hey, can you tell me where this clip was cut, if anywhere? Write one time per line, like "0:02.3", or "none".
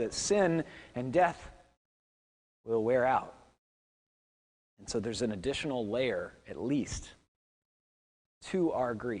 0:08.3